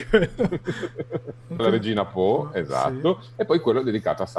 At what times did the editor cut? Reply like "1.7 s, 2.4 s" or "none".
1.6 s

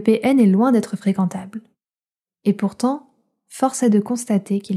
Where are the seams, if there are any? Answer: none

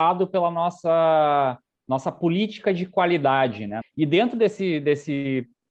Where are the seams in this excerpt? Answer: 3.8 s

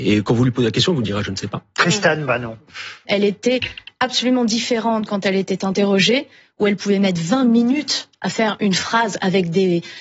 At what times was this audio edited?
3.0 s

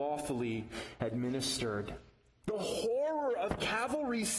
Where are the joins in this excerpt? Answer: 2.4 s

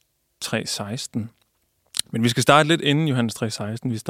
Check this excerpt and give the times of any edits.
none

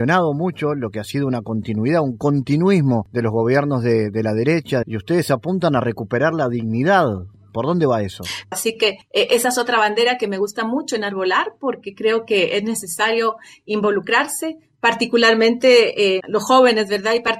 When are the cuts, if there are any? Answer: 4.8 s, 8.5 s, 16.2 s

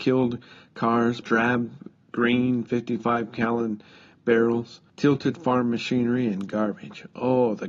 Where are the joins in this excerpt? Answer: 1.2 s, 4.9 s

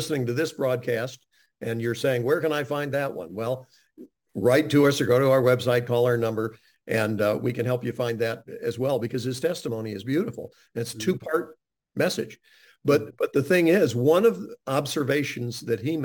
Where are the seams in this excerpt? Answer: none

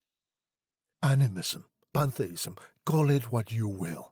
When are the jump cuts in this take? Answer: 0.9 s

